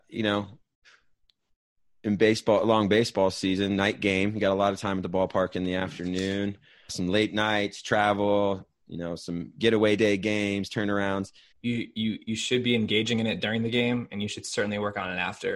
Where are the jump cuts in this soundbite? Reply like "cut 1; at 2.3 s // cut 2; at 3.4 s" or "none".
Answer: cut 1; at 6.9 s // cut 2; at 11.5 s

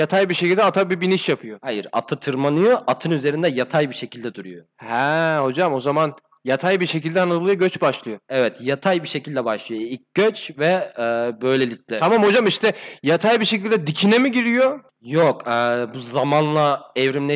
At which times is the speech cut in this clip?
cut 1; at 14.9 s

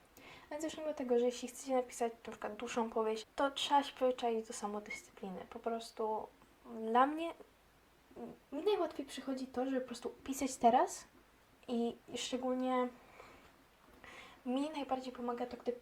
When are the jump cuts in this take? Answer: cut 1; at 3.2 s // cut 2; at 8.4 s

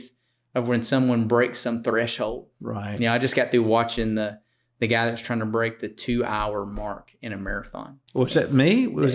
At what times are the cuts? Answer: cut 1; at 8.1 s

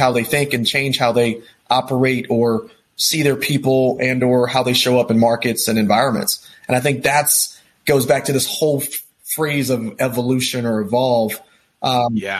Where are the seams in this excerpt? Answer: none

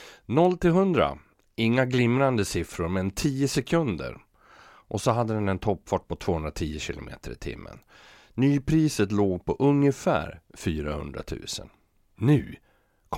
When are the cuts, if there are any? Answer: cut 1; at 12.1 s

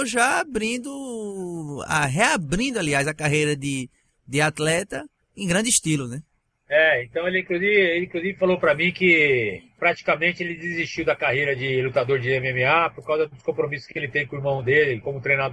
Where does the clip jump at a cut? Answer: none

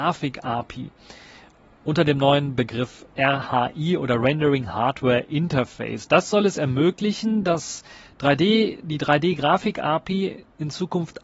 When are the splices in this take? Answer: none

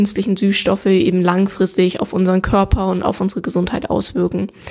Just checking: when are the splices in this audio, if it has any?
none

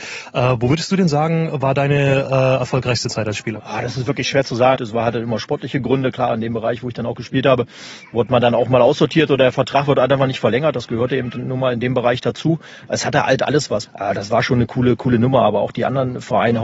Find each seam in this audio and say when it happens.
cut 1; at 4.8 s // cut 2; at 13.9 s

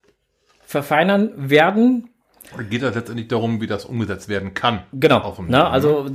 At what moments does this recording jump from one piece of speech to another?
none

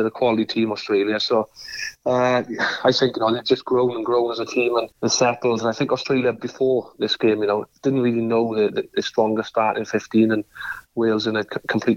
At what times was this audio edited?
cut 1; at 4.9 s

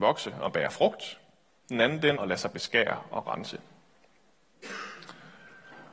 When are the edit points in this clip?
cut 1; at 2.2 s

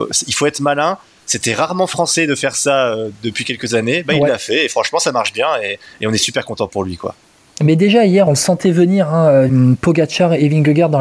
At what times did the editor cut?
cut 1; at 8.3 s // cut 2; at 9.5 s

